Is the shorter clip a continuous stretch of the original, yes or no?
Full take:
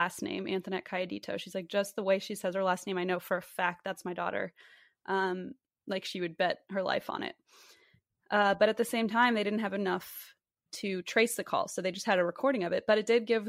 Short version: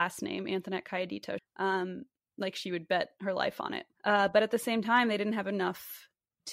no